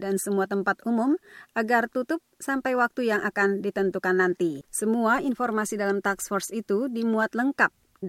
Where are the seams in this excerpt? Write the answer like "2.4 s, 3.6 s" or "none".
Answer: 4.7 s

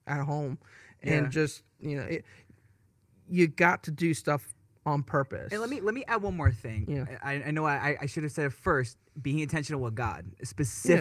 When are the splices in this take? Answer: none

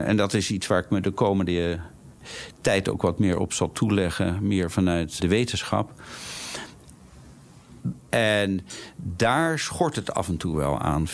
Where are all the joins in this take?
5.2 s, 8.0 s

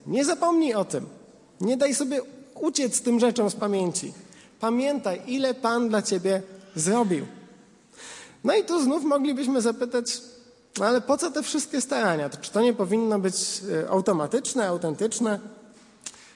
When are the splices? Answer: none

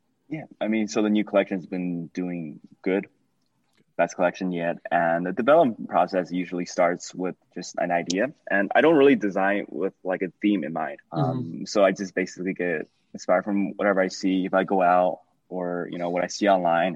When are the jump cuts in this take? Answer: 11.0 s

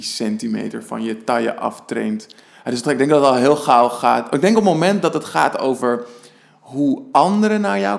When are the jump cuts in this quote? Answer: none

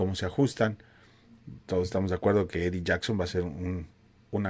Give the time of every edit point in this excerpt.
none

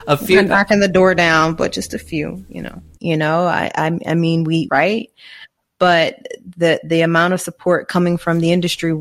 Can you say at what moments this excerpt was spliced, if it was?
3.0 s, 4.7 s

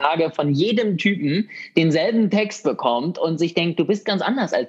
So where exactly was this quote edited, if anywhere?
none

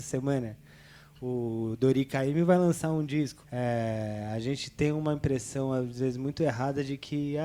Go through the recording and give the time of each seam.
3.4 s

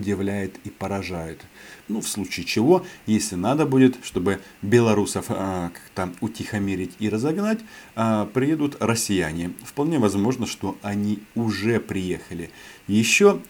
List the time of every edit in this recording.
1.8 s

